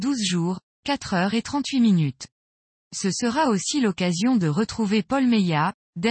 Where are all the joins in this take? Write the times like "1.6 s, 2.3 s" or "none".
none